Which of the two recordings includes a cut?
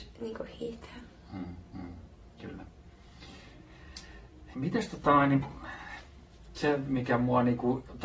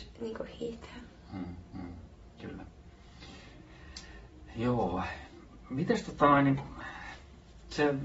first; 1 cut; at 4.5 s

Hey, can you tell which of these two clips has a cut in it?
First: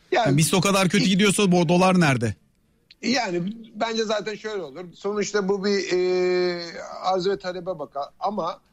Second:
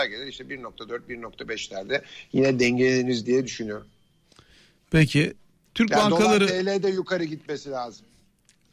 first; 1 cut; at 4.9 s

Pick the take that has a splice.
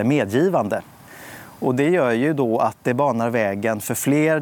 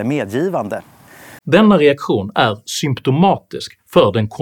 second; 1 cut; at 1.4 s

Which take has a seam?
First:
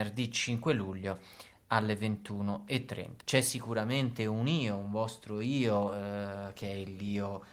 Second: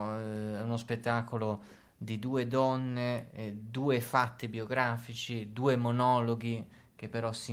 first; 1 cut; at 3.2 s

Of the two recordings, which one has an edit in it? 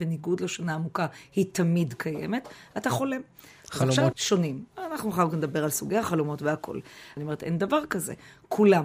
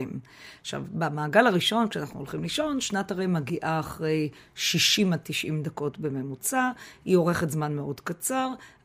first; 2 cuts; at 4.1 s, 7.2 s

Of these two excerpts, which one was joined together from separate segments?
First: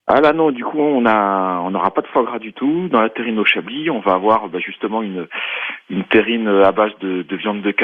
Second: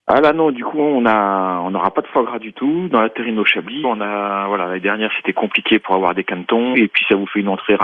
second; 2 cuts; at 3.8 s, 6.7 s

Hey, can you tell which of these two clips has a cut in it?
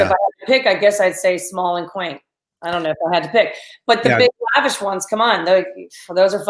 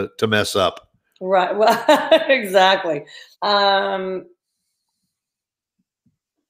second; 1 cut; at 3.3 s

